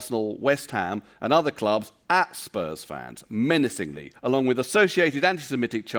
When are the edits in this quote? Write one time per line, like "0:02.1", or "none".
0:04.2